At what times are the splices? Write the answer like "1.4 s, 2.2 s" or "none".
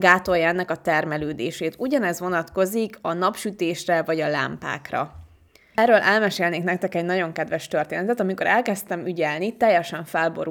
none